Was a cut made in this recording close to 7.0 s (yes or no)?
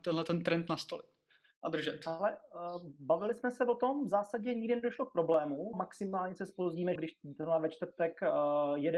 yes